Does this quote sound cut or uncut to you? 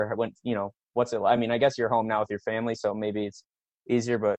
uncut